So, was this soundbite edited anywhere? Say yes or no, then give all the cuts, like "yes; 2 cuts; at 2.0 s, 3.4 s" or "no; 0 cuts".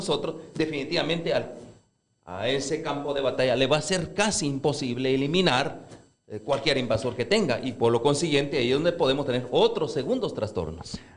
no; 0 cuts